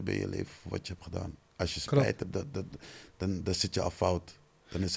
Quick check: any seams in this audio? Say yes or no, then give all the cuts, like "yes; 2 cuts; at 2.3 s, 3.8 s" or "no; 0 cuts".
no; 0 cuts